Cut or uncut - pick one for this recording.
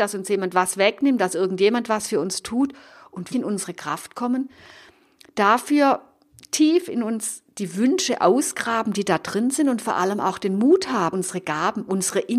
cut